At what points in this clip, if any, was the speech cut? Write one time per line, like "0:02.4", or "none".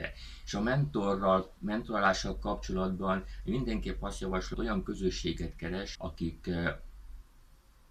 0:04.5
0:05.9